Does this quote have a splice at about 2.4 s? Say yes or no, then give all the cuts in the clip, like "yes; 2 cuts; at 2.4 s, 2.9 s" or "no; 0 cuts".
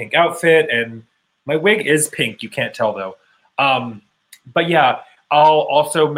no; 0 cuts